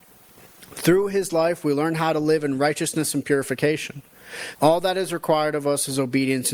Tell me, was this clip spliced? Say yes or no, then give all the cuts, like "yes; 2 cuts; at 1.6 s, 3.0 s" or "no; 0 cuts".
yes; 1 cut; at 4.5 s